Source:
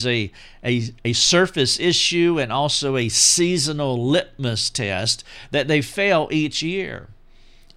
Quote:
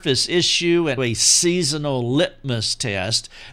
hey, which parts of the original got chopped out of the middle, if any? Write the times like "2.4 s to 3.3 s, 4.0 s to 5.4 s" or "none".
2.5 s to 2.9 s